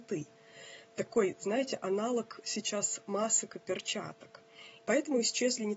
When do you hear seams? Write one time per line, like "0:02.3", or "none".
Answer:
0:04.8